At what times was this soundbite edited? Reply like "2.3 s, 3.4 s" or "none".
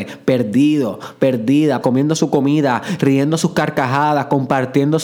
1.8 s